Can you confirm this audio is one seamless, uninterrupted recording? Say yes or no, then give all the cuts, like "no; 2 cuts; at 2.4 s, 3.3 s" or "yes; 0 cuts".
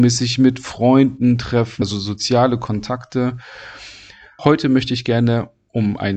no; 2 cuts; at 1.8 s, 4.4 s